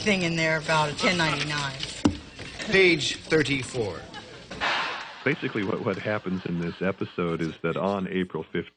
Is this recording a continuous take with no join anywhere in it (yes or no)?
no